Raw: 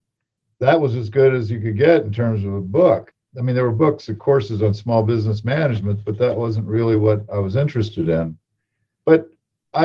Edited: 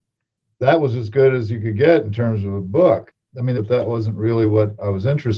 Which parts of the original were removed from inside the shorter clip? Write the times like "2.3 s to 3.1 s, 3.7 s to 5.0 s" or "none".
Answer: 3.5 s to 6.0 s